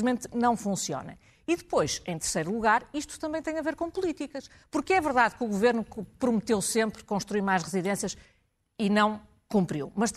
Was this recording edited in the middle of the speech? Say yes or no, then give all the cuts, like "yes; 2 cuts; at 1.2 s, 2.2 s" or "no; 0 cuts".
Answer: no; 0 cuts